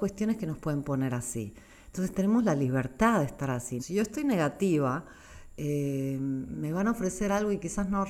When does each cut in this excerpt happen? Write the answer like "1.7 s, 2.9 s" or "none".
3.8 s

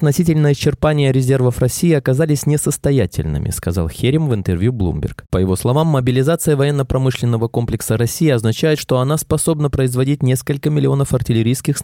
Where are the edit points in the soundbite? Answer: none

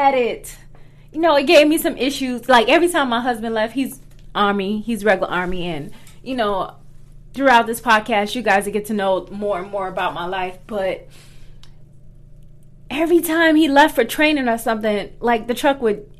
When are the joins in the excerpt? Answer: none

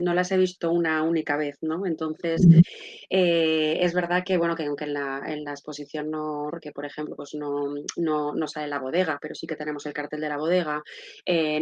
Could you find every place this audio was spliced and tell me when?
6.5 s

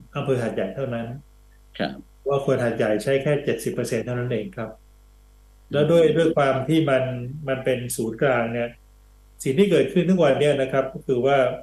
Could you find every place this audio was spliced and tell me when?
none

